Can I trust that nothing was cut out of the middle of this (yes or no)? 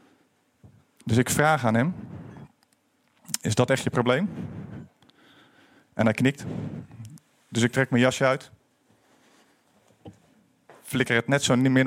yes